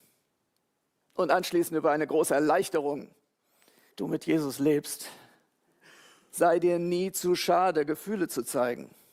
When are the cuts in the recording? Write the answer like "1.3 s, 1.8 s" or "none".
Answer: 3.9 s